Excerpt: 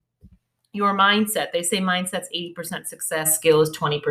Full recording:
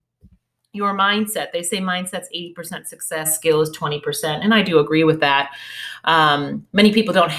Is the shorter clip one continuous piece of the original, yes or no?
yes